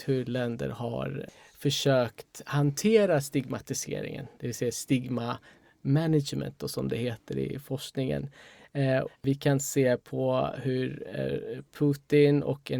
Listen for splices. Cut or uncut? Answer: cut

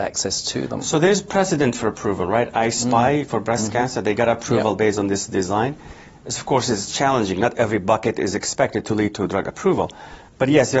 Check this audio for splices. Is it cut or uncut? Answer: uncut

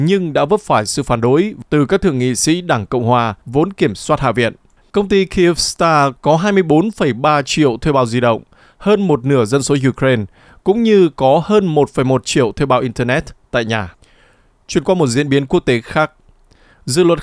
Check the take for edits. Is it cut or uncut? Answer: cut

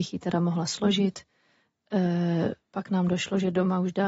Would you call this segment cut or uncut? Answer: uncut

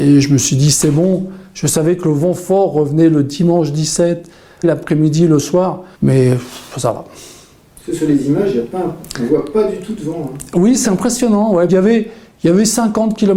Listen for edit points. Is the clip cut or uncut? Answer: cut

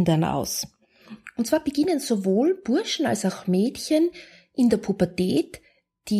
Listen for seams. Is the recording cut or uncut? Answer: uncut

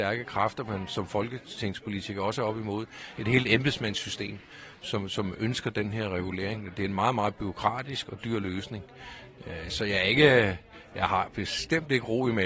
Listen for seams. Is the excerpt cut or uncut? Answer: uncut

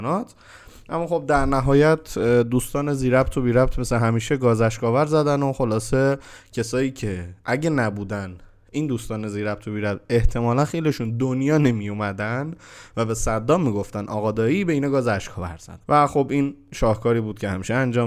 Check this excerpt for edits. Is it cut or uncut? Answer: cut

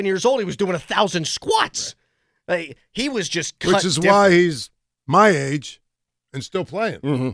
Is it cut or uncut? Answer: uncut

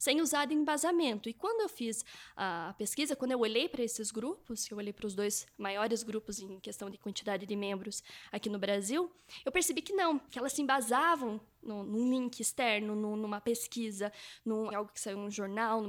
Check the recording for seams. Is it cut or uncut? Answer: cut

